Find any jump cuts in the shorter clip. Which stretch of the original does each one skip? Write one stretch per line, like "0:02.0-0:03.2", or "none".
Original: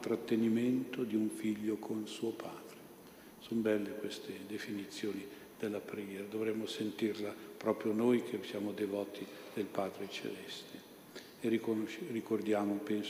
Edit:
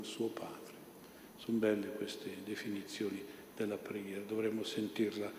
none